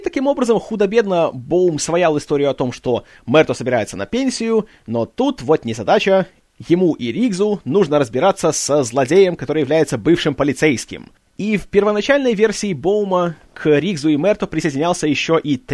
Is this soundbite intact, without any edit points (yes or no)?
yes